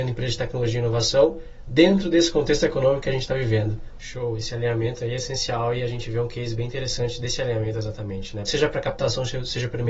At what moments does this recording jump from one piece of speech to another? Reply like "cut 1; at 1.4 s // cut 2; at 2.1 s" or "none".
cut 1; at 4.0 s // cut 2; at 8.5 s

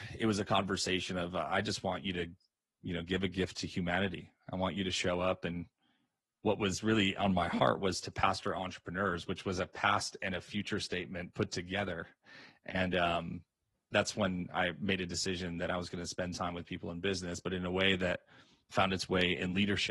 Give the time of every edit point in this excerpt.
cut 1; at 13.9 s // cut 2; at 18.7 s

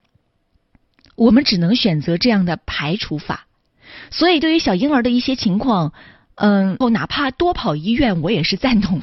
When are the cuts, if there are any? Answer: cut 1; at 6.8 s

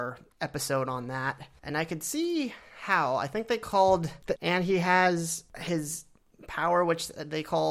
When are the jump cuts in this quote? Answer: cut 1; at 4.4 s

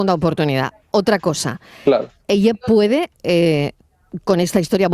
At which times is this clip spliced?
none

